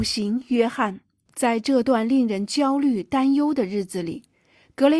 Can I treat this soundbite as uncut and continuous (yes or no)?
no